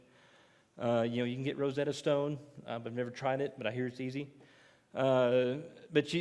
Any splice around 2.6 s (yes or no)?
no